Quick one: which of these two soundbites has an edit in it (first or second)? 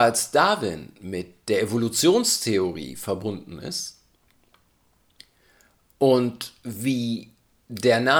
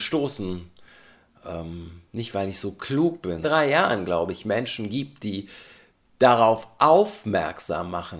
second